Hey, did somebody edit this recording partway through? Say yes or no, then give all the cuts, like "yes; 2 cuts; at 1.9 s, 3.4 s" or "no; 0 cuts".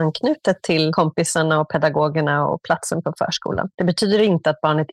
no; 0 cuts